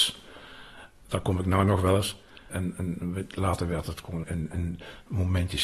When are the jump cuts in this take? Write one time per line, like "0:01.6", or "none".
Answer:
0:02.5
0:04.2